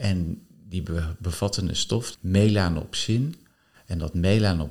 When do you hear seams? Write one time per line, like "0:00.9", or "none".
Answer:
0:02.1